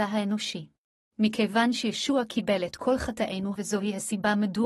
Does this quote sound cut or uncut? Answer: cut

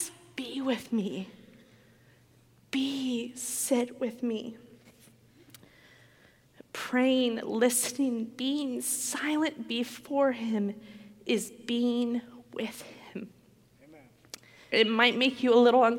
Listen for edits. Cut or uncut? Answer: cut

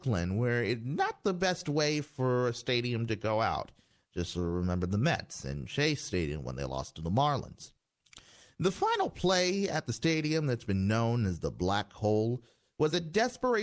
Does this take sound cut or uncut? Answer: uncut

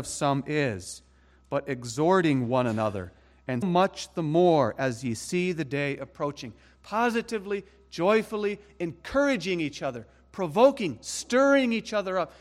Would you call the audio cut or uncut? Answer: cut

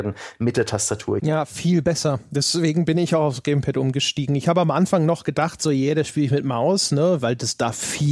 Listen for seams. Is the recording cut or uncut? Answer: cut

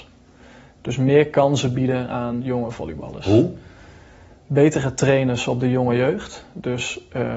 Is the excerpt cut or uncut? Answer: uncut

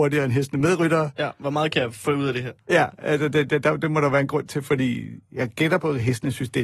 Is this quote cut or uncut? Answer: uncut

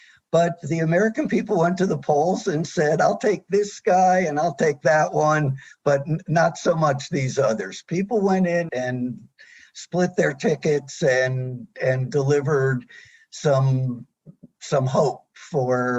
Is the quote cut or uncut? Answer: cut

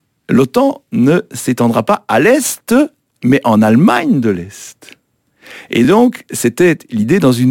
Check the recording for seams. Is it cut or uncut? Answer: uncut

